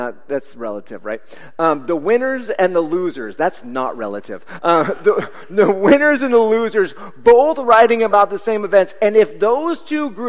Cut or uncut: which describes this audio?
uncut